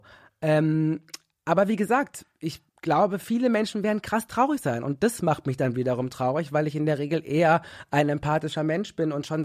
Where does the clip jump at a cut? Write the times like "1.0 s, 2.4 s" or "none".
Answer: 2.7 s